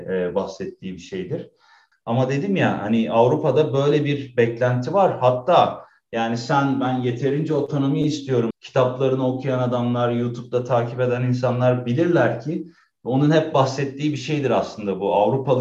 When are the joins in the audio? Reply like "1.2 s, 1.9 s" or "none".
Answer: 1.9 s, 8.5 s